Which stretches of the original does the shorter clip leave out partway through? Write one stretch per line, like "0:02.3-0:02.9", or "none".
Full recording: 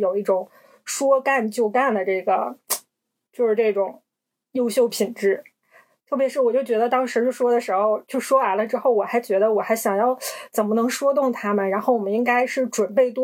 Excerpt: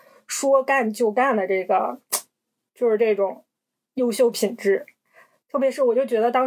none